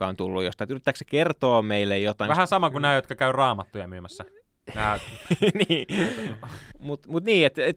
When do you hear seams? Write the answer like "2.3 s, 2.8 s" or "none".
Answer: 6.7 s